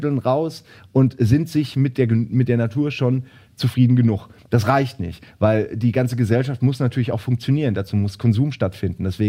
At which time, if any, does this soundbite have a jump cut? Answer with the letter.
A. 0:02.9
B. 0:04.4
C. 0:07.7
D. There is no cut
D